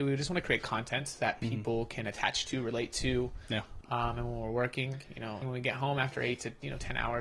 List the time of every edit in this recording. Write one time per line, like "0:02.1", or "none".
0:03.8
0:05.4